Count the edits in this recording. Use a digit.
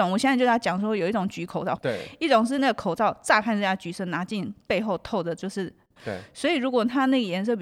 2